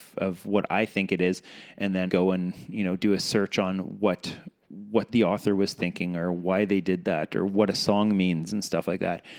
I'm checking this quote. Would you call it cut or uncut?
cut